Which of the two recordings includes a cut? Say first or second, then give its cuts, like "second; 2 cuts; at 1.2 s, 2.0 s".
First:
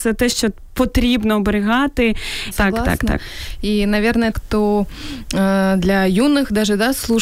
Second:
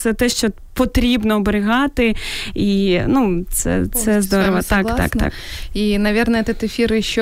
first; 2 cuts; at 2.5 s, 4.3 s